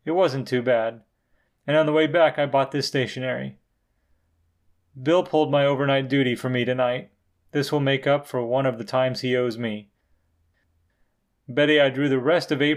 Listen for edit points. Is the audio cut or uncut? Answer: uncut